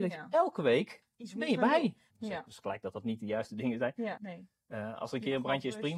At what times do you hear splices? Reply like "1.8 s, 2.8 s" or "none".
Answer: 2.1 s, 4.2 s